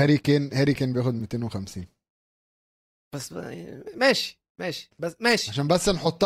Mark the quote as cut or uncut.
uncut